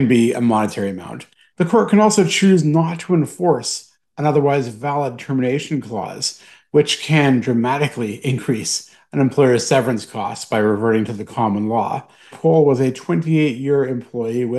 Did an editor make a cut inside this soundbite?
yes; 2 cuts; at 1.5 s, 12.3 s

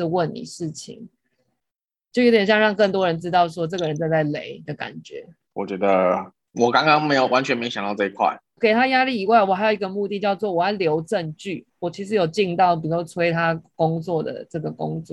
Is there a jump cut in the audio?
yes; 3 cuts; at 5.5 s, 8.6 s, 11.7 s

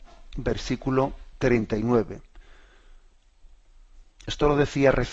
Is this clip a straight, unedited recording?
yes; 0 cuts

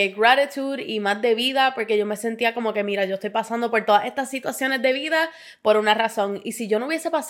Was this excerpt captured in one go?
yes; 0 cuts

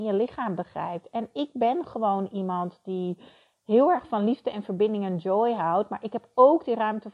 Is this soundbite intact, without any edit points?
yes; 0 cuts

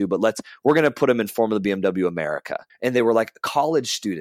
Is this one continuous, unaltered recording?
no; 1 cut; at 2.7 s

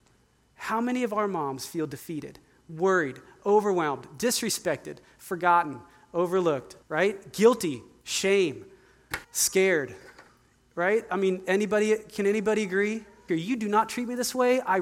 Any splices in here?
yes; 3 cuts; at 6.8 s, 9.2 s, 13.3 s

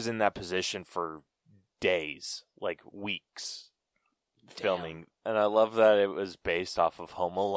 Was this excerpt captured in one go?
no; 1 cut; at 5.1 s

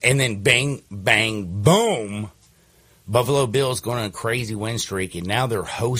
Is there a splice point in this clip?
no; 0 cuts

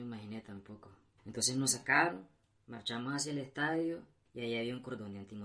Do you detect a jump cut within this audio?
yes; 1 cut; at 1.2 s

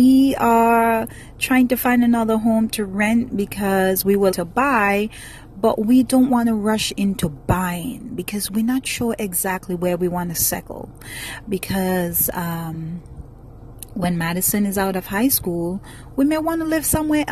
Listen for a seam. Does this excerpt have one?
yes; 1 cut; at 4.3 s

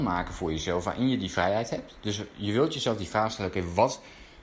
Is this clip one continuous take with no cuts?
yes; 0 cuts

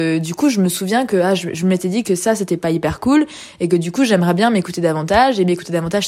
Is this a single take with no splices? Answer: yes; 0 cuts

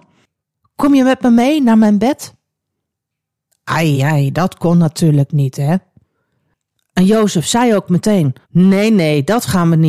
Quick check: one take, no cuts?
no; 2 cuts; at 3.9 s, 8.4 s

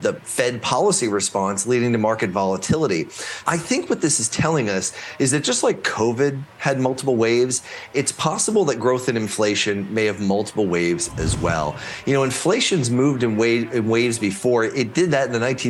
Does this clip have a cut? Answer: yes; 1 cut; at 3.4 s

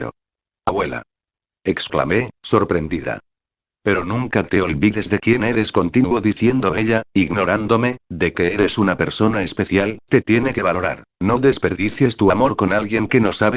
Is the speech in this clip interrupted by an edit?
yes; 2 cuts; at 10.0 s, 11.1 s

